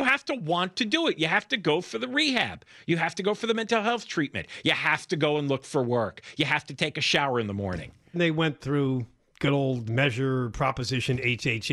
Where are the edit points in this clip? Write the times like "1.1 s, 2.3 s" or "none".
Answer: 8.1 s, 9.9 s